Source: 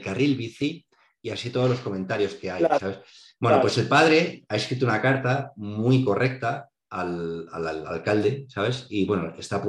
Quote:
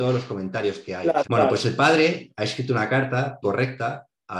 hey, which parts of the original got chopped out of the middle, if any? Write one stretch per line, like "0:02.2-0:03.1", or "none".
0:02.8-0:03.4
0:05.5-0:06.0